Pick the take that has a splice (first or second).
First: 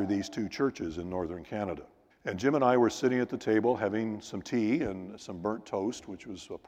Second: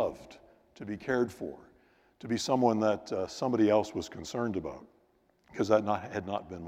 first